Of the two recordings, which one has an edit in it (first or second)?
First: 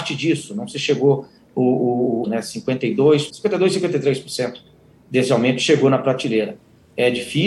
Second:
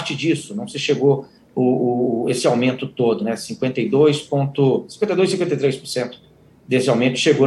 first